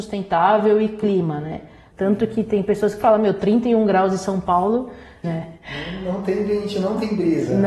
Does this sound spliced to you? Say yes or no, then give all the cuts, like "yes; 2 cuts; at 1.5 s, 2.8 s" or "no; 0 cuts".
yes; 2 cuts; at 1.9 s, 5.2 s